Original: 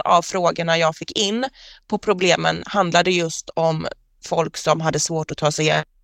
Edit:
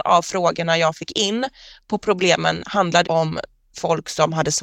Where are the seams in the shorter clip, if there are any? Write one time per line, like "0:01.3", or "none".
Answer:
0:03.0